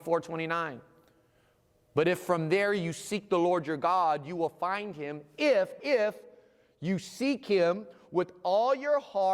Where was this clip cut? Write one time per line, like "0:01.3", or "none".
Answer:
0:05.8

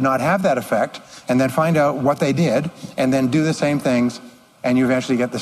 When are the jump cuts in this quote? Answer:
none

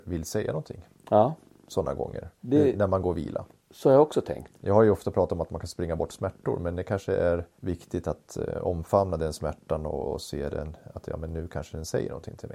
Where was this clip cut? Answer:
0:04.5
0:07.6

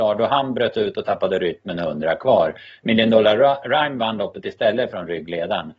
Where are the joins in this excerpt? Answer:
none

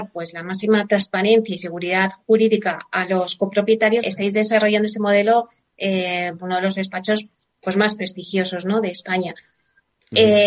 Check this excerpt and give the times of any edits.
0:04.0
0:06.4

